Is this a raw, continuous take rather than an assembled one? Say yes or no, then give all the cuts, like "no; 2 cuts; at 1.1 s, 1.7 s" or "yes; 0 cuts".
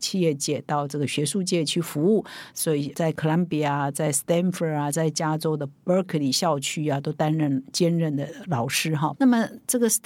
yes; 0 cuts